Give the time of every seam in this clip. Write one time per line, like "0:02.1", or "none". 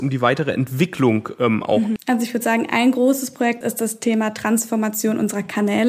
0:02.0
0:03.6